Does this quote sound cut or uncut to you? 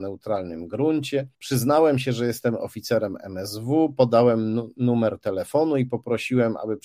cut